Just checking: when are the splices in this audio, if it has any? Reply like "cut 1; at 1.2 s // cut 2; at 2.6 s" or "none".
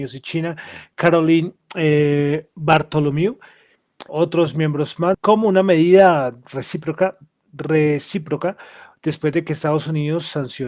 cut 1; at 4.1 s // cut 2; at 5.1 s